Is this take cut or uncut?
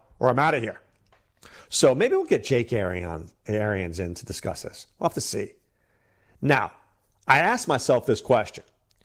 uncut